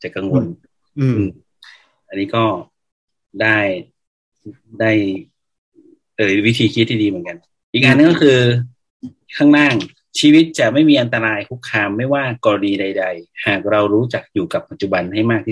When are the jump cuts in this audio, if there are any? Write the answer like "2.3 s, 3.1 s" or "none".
none